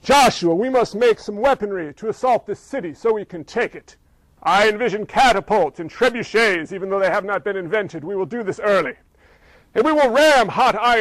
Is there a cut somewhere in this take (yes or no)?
no